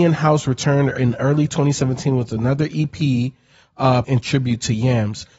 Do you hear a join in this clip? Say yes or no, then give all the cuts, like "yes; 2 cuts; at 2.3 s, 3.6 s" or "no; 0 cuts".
yes; 1 cut; at 4.0 s